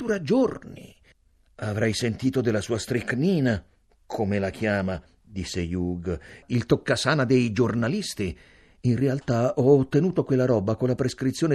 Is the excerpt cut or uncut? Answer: uncut